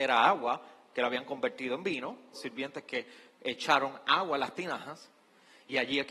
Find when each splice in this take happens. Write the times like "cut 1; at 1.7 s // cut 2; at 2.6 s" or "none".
cut 1; at 2.3 s